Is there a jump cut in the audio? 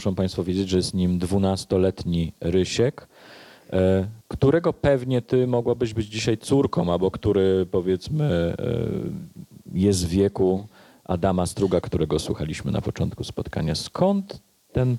yes; 2 cuts; at 4.2 s, 11.8 s

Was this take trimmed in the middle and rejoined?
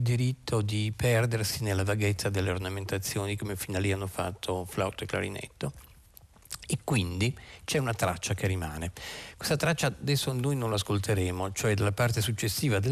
no; 0 cuts

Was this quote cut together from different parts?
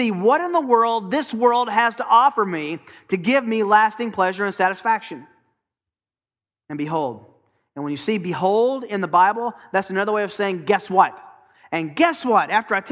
no; 0 cuts

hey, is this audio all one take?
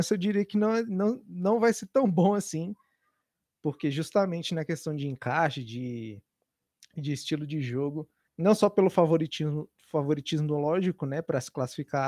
no; 1 cut; at 8.3 s

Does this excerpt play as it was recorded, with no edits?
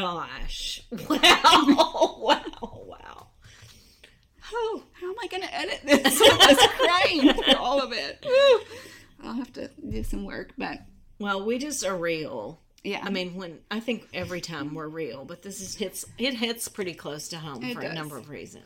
no; 2 cuts; at 13.6 s, 15.8 s

